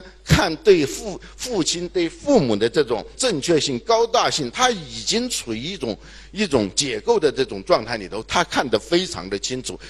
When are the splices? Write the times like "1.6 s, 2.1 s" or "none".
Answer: 3.1 s

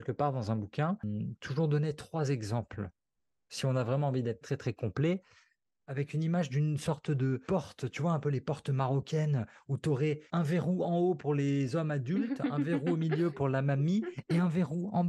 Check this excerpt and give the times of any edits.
4.4 s

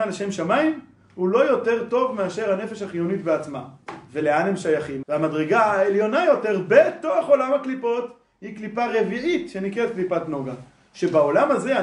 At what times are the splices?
5.0 s

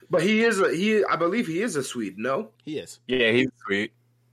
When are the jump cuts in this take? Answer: 2.5 s

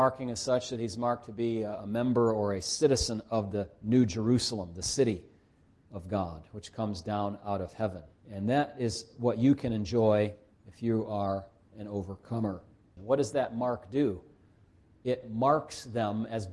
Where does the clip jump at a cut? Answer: 8.2 s, 13.0 s

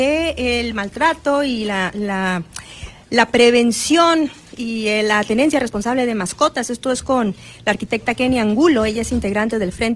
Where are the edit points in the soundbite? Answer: none

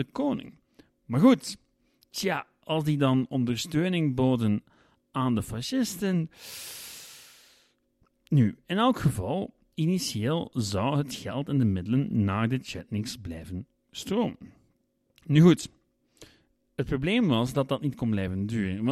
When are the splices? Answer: none

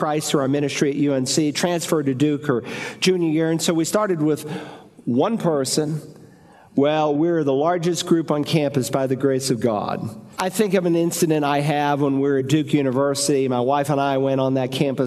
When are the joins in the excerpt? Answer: 7.1 s, 10.4 s

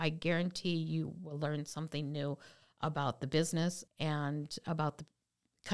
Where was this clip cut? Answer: 3.9 s

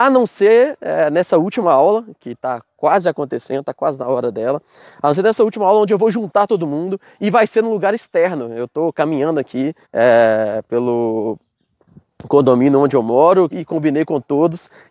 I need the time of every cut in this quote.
9.8 s, 13.5 s

